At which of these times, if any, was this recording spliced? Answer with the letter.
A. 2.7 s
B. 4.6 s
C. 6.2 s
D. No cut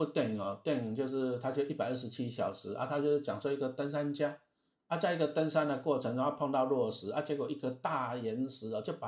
D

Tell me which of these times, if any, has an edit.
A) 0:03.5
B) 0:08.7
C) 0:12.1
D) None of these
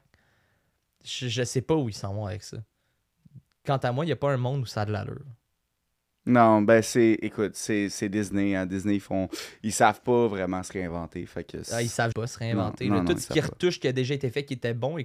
C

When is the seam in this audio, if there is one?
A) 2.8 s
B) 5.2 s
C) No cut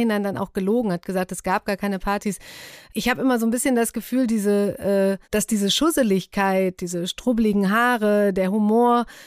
B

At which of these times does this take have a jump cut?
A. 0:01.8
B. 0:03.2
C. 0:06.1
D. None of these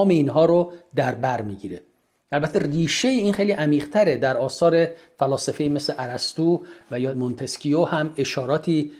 D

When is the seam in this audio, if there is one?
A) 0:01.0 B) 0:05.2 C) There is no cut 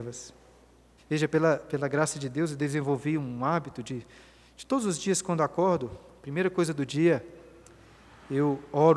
A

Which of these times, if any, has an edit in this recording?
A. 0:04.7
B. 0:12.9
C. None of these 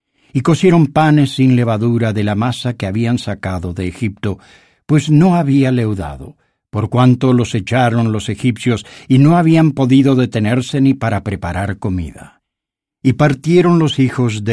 B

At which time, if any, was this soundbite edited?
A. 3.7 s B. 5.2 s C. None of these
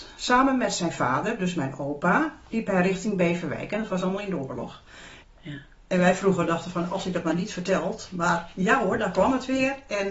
B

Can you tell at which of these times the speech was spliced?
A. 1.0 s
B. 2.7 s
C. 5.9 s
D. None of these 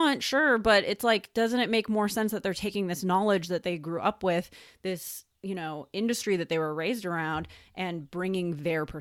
D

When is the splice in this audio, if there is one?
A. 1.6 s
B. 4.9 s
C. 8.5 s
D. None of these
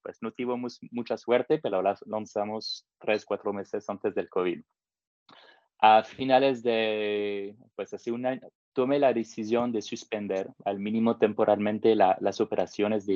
C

